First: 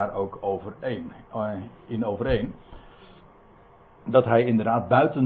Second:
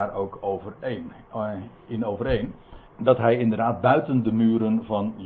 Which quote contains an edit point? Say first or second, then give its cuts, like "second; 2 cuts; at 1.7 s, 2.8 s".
second; 1 cut; at 2.9 s